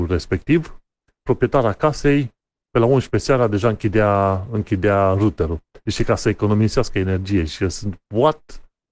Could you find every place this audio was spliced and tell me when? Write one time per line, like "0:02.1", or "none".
none